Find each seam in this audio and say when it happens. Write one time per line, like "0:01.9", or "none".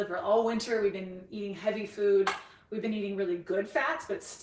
none